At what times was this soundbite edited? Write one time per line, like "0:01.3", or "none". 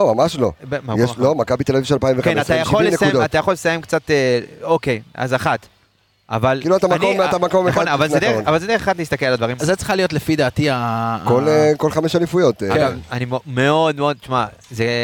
0:09.6

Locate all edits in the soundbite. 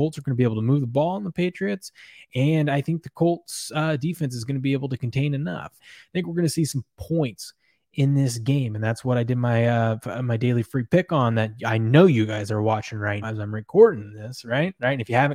0:05.8
0:13.2

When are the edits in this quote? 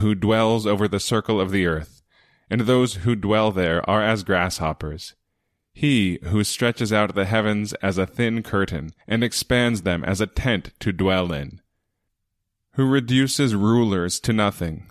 0:09.0

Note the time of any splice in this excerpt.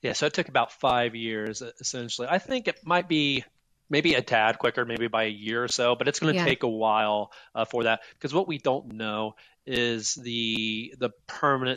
none

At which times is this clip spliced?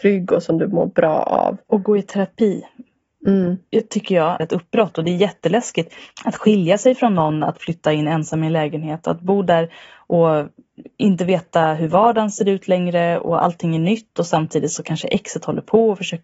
0:04.4

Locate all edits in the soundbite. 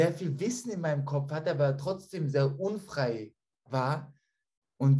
none

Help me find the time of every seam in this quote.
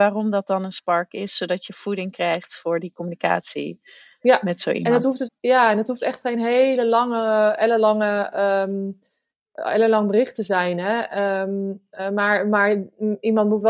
0:05.3

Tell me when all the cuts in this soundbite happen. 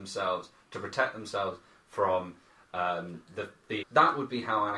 0:03.8

